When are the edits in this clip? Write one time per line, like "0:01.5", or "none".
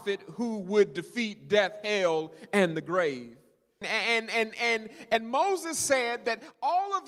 0:03.8

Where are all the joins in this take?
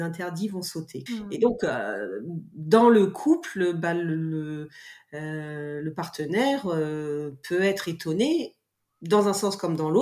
0:01.1

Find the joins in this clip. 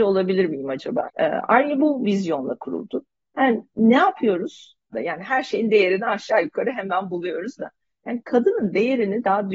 0:01.1
0:04.9

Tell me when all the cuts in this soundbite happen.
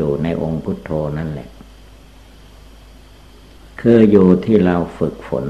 none

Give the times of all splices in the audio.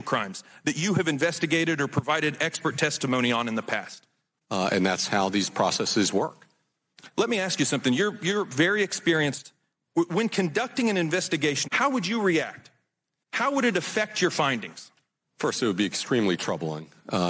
0:04.4
0:11.6

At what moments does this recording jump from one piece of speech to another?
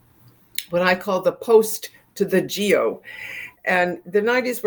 none

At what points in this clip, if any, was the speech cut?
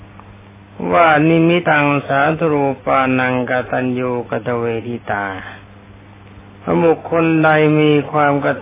0:01.6

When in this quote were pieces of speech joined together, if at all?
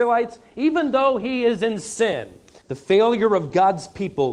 0:02.6

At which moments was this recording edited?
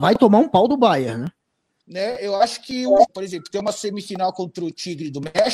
0:01.8
0:03.1

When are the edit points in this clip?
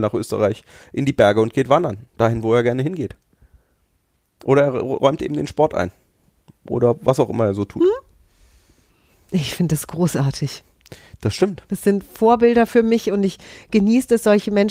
none

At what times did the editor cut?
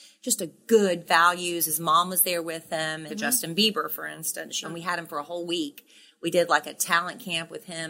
0:01.0
0:03.1
0:04.6

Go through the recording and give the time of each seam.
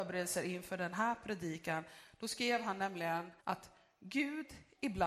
0:03.4

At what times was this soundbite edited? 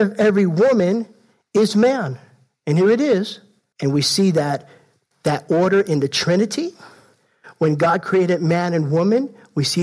0:03.7

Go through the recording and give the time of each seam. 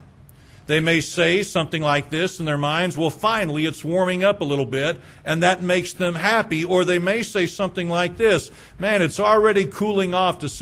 none

